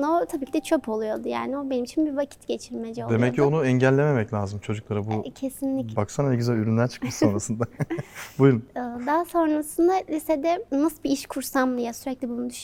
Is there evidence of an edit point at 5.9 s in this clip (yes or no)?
yes